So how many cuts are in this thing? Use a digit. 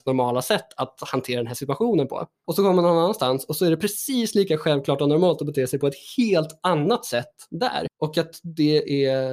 2